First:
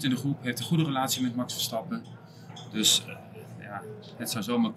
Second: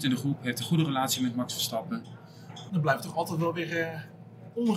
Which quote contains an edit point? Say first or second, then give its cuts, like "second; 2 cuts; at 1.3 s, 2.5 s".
second; 1 cut; at 2.7 s